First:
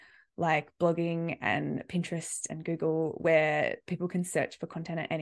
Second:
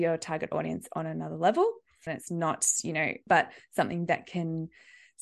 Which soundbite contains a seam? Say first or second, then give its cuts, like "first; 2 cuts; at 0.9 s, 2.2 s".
second; 2 cuts; at 2.1 s, 3.3 s